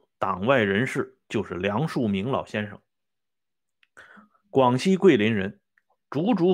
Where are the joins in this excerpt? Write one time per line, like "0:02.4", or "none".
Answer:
none